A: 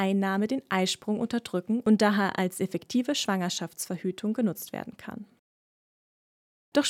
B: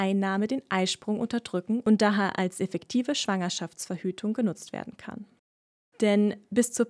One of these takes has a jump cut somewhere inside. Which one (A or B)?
B